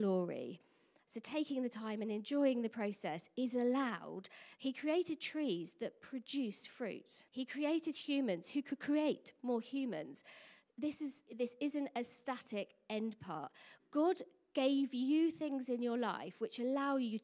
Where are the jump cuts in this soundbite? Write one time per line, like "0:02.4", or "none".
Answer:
0:04.6
0:07.3
0:11.3